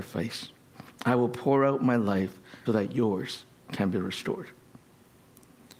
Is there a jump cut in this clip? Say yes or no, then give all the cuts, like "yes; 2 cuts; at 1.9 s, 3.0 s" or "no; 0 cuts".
yes; 1 cut; at 2.7 s